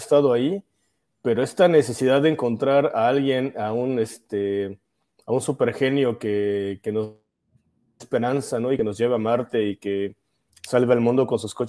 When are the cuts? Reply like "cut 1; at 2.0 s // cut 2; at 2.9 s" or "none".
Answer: none